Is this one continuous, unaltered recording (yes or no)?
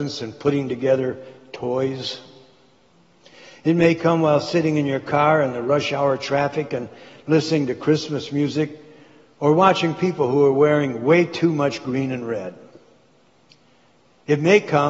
yes